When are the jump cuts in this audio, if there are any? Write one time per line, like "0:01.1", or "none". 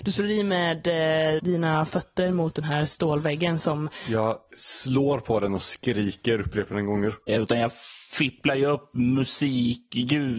0:01.4
0:07.3

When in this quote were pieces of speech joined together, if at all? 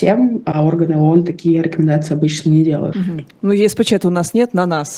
0:02.9

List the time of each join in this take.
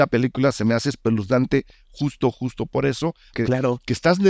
0:03.3

